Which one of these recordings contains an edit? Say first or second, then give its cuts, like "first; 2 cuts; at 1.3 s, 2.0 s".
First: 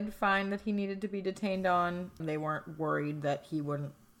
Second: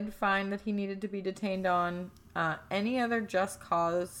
first; 1 cut; at 2.2 s